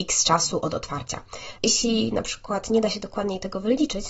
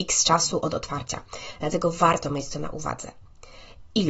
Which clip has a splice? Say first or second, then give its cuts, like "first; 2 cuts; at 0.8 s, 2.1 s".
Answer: first; 1 cut; at 1.6 s